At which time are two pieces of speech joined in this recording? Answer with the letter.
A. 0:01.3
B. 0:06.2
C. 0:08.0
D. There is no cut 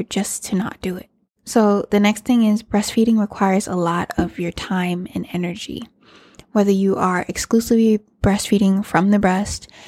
D